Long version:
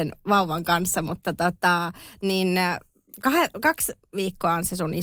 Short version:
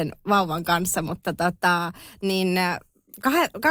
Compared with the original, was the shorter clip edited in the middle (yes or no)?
no